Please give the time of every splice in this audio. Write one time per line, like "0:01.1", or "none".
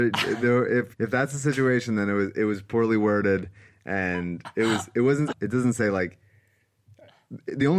0:00.9
0:05.3